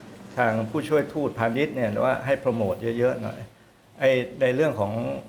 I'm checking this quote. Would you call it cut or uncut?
uncut